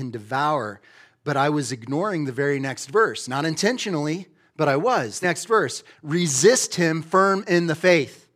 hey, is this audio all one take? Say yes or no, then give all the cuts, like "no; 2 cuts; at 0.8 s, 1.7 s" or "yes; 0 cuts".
no; 1 cut; at 5.2 s